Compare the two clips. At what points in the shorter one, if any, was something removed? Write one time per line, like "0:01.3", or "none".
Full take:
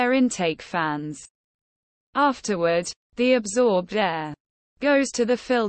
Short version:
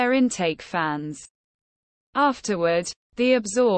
none